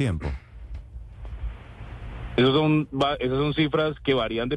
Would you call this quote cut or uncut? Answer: uncut